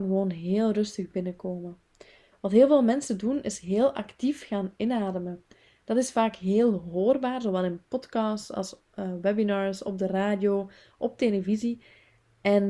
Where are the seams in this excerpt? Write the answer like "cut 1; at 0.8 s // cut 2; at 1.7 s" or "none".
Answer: none